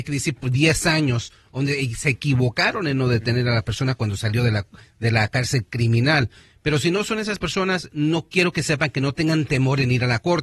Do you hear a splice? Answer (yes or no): no